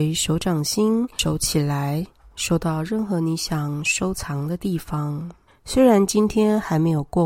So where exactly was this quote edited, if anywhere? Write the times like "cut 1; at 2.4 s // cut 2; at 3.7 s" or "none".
cut 1; at 5.5 s